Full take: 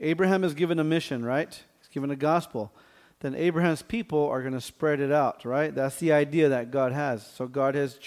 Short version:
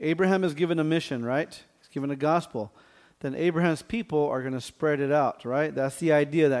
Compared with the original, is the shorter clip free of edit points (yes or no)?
yes